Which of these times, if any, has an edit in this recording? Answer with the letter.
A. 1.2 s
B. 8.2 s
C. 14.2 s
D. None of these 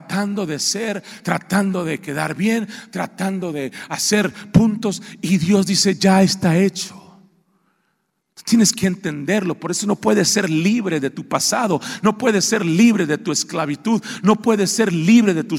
A